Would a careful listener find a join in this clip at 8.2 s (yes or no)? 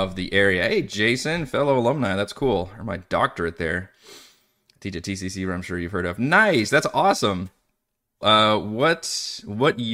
yes